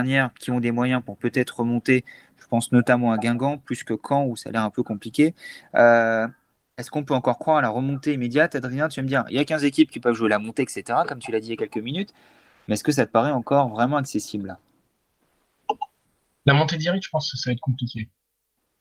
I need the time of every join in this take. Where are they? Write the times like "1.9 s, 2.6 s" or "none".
none